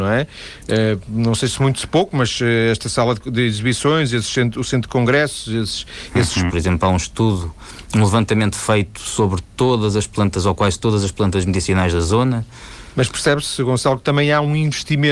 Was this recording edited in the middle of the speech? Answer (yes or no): yes